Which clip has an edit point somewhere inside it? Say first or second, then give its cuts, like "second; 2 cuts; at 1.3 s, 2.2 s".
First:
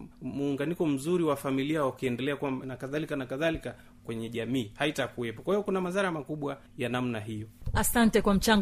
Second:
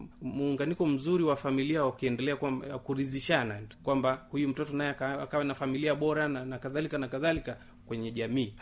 first; 1 cut; at 2.6 s